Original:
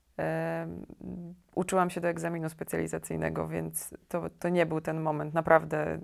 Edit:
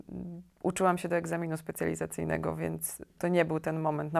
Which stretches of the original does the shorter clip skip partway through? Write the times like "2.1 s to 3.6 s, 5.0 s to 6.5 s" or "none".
4.1 s to 4.4 s